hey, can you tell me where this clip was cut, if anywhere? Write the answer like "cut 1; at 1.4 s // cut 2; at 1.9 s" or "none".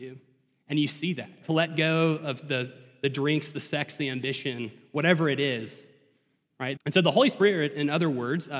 cut 1; at 1.4 s // cut 2; at 6.8 s